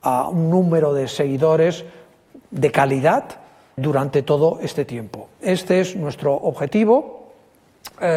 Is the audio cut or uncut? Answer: cut